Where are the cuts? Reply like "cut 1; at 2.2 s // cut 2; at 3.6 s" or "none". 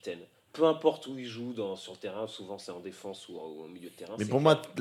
none